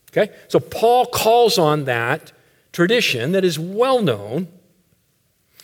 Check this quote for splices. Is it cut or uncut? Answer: uncut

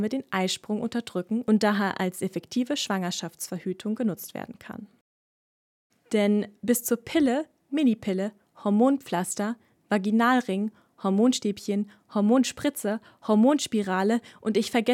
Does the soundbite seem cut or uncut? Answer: cut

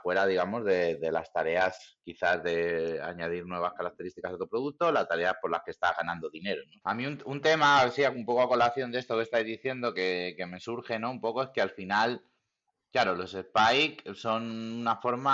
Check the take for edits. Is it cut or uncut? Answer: cut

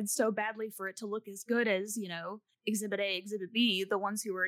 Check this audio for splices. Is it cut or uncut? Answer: uncut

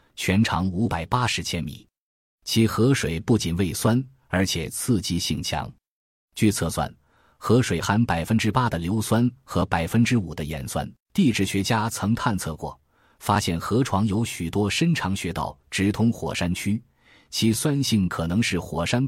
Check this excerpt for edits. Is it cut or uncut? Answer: cut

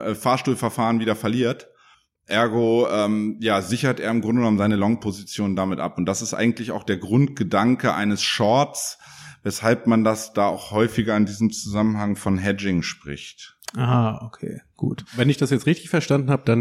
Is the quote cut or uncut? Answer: uncut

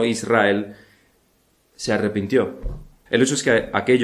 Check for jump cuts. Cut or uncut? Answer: cut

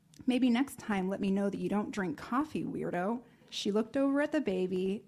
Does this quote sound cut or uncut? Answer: cut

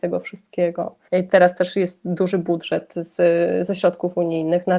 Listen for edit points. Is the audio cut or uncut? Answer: cut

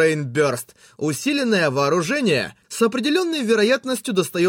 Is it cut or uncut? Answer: cut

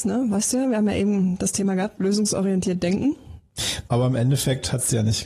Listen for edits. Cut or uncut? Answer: cut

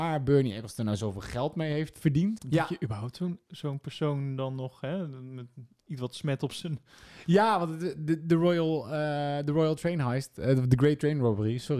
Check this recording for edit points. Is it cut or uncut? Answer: cut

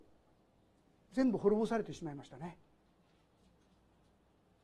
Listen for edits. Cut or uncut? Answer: uncut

